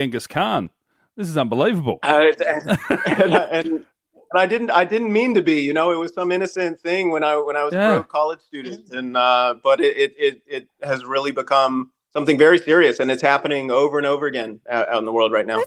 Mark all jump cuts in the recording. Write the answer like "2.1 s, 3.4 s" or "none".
none